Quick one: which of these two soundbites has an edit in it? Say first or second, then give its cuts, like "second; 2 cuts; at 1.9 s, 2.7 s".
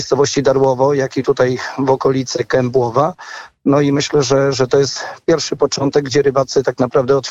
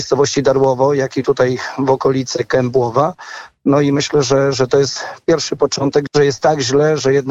second; 1 cut; at 6.1 s